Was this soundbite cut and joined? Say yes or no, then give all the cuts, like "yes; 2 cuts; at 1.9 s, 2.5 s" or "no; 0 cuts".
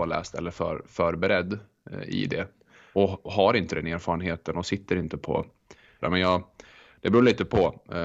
yes; 2 cuts; at 2.9 s, 6.0 s